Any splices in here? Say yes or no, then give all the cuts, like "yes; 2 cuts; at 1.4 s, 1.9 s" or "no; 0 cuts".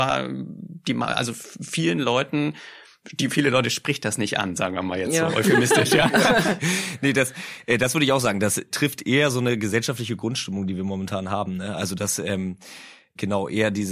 yes; 1 cut; at 8.7 s